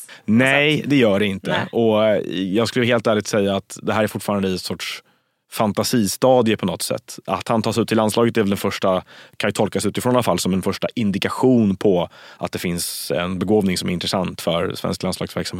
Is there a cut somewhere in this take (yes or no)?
no